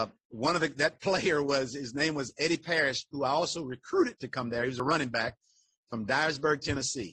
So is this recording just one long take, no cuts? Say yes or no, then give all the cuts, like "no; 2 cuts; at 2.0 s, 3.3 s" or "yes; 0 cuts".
yes; 0 cuts